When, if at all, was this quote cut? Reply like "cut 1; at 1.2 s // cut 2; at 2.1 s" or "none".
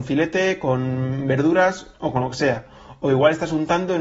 none